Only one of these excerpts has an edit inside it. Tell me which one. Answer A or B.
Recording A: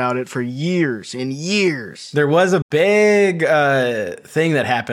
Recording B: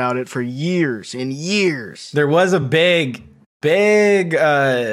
A